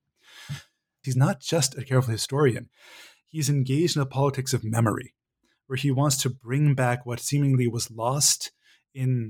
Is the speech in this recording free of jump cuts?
no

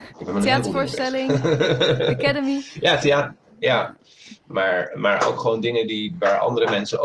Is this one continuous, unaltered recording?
yes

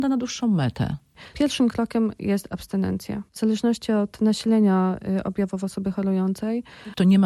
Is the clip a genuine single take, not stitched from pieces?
no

